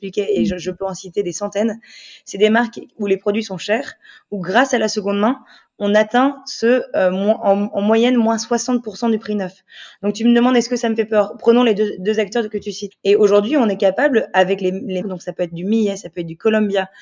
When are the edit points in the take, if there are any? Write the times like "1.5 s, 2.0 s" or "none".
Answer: 12.9 s, 15.0 s